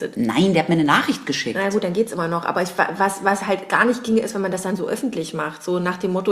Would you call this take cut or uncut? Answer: uncut